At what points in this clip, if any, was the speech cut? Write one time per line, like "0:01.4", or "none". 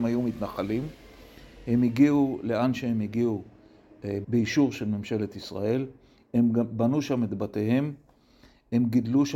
0:04.2